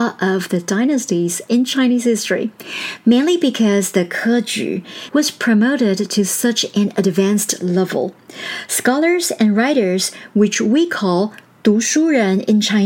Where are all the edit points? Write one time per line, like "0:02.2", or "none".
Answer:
0:05.1